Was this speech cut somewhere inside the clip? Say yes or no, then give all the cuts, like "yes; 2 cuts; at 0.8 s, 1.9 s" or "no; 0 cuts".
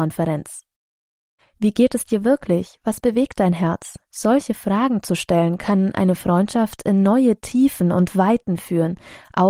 yes; 2 cuts; at 1.4 s, 4.0 s